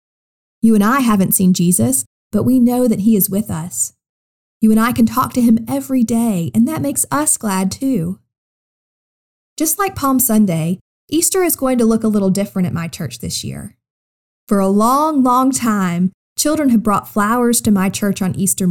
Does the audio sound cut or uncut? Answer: uncut